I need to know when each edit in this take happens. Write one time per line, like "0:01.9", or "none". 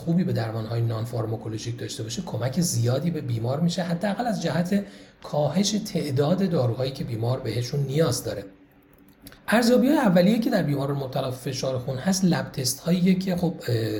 0:09.4